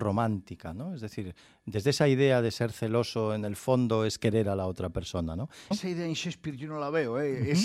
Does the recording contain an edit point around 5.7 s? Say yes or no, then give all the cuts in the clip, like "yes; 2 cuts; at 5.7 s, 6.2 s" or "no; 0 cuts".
yes; 1 cut; at 5.7 s